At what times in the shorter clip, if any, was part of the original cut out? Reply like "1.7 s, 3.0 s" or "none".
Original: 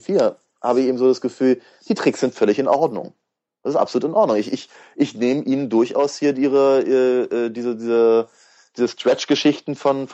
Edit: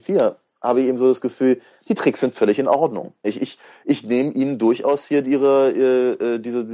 3.2 s